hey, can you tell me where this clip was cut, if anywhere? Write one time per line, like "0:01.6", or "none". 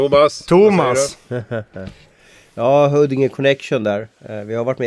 none